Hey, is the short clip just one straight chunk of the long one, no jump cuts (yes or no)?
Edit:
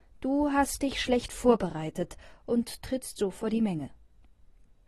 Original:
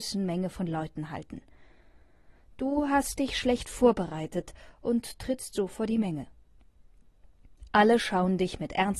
yes